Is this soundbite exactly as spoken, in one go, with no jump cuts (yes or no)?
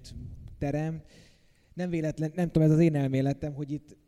yes